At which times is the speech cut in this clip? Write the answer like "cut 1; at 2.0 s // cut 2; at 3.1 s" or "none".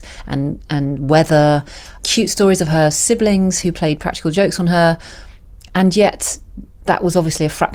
none